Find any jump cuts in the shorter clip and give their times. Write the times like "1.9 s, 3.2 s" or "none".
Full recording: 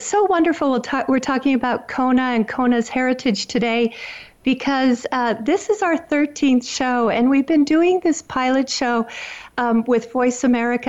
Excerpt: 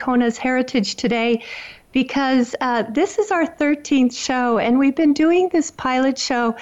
none